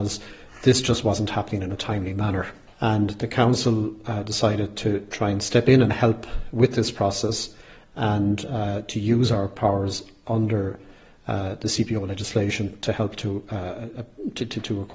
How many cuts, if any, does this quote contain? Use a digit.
1